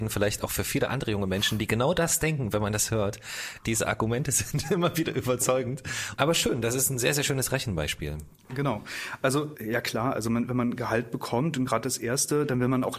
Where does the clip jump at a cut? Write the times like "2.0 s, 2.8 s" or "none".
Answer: 6.2 s